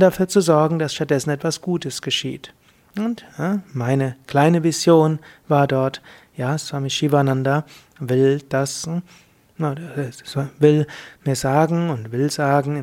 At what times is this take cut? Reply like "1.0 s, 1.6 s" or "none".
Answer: none